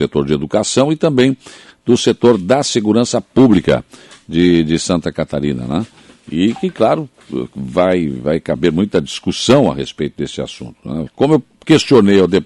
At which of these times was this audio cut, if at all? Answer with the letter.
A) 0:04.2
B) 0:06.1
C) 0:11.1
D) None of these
C